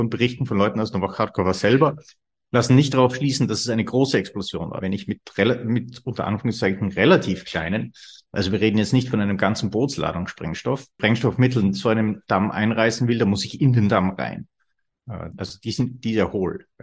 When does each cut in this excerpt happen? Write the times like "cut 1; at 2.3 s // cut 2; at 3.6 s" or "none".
cut 1; at 4.8 s // cut 2; at 15.3 s